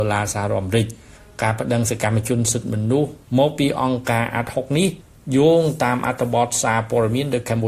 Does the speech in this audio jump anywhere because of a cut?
no; 0 cuts

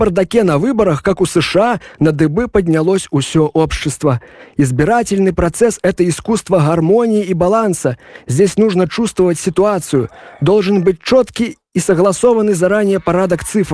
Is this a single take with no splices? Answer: yes; 0 cuts

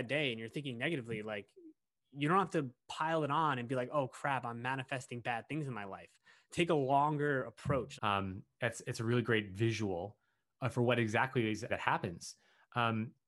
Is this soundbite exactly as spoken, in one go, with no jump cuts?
no; 2 cuts; at 8.0 s, 11.7 s

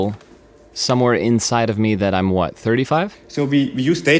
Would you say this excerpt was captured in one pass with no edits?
no; 1 cut; at 3.1 s

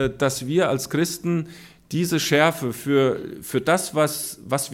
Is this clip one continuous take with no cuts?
yes; 0 cuts

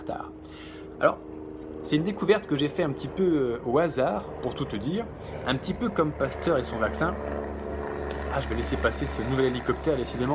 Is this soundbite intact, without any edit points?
yes; 0 cuts

